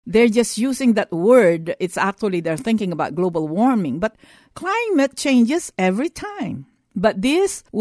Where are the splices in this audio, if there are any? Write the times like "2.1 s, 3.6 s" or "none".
none